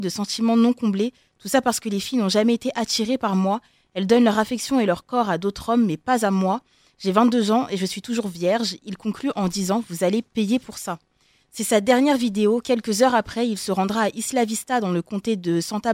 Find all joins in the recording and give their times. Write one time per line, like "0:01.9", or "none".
none